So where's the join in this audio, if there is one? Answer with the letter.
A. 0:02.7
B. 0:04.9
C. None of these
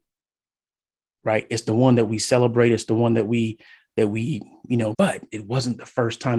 B